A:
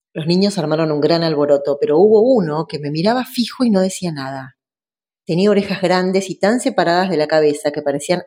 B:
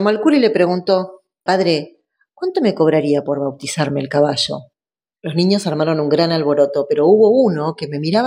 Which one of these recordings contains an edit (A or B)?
B